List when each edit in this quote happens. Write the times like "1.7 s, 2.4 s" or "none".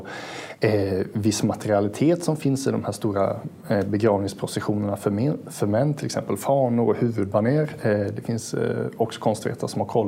none